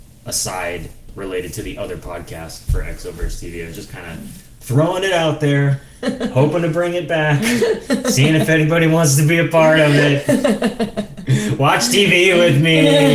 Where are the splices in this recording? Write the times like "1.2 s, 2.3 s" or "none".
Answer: none